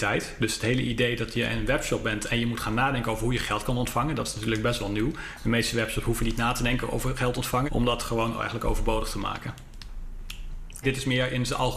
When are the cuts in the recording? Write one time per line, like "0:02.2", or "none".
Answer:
0:07.7
0:10.8